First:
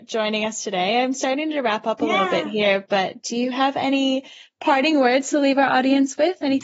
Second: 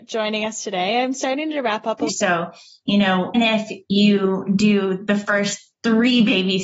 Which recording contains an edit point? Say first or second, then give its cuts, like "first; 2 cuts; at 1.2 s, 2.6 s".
second; 2 cuts; at 2.1 s, 3.3 s